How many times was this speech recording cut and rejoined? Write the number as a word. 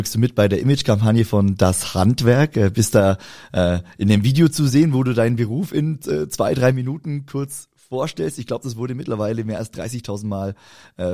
zero